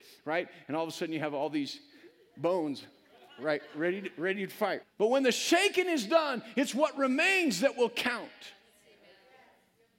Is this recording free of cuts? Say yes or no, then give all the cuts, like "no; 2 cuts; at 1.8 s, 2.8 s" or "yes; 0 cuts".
no; 1 cut; at 4.8 s